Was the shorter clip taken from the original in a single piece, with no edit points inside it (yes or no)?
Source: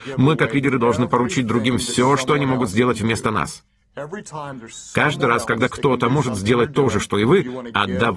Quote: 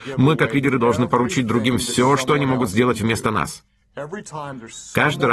yes